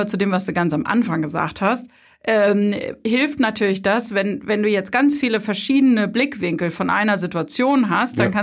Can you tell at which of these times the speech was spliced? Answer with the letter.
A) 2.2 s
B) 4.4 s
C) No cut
C